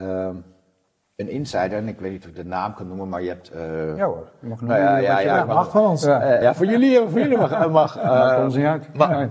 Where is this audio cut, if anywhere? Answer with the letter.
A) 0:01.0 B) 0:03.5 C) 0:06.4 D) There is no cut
C